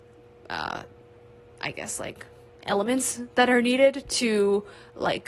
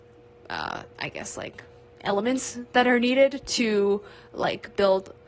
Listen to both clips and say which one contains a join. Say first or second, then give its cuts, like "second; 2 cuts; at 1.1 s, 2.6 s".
second; 1 cut; at 0.9 s